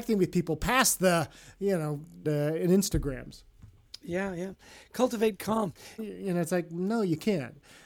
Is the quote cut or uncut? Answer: cut